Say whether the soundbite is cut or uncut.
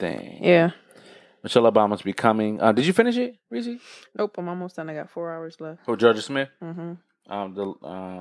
cut